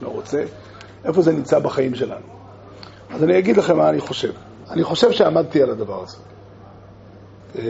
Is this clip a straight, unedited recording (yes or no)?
no